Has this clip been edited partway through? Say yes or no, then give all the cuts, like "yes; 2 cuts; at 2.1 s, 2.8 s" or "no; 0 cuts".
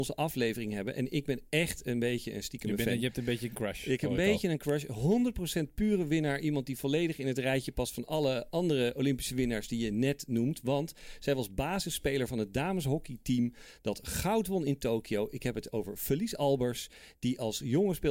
no; 0 cuts